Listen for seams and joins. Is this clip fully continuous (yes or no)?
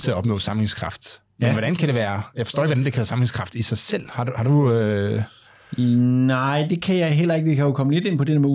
yes